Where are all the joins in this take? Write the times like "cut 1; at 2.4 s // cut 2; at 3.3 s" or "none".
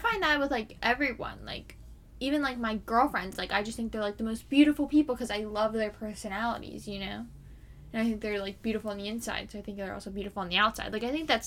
none

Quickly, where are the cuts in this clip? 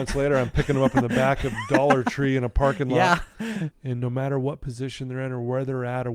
cut 1; at 3.7 s

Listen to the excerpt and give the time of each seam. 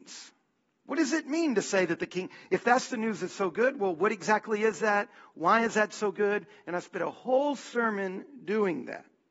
none

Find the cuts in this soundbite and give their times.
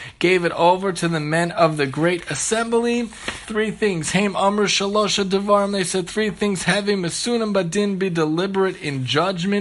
cut 1; at 3.5 s

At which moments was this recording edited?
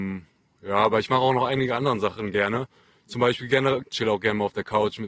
cut 1; at 3.8 s

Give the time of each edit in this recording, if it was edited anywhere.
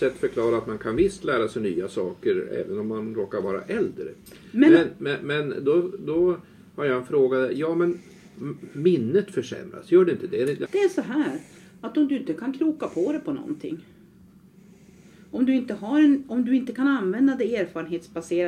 cut 1; at 10.7 s

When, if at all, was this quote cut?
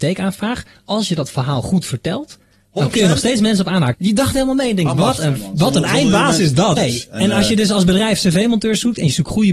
cut 1; at 3.9 s // cut 2; at 6.8 s

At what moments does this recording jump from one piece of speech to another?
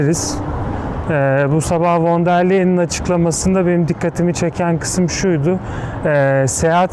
cut 1; at 1.0 s

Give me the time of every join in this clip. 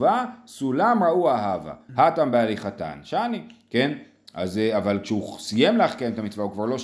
cut 1; at 1.9 s

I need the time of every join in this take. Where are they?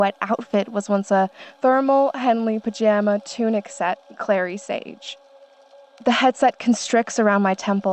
none

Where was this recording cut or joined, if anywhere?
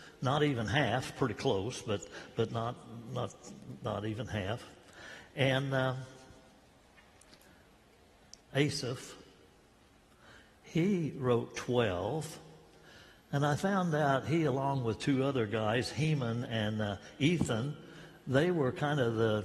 cut 1; at 8.4 s

